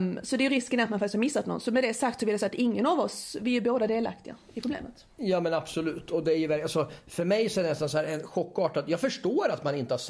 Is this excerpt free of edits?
yes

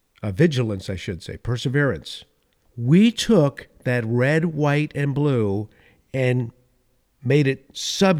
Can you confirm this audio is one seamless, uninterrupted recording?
no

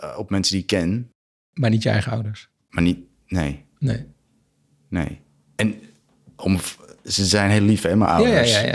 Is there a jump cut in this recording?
no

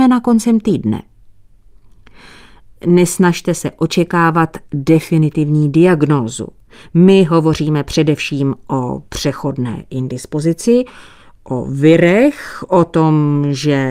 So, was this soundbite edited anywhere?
no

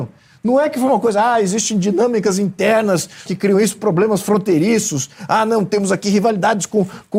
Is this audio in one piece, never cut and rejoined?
no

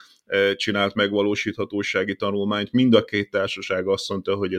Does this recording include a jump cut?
no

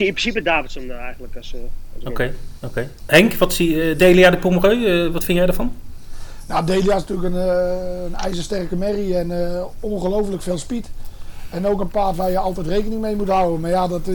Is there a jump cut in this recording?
no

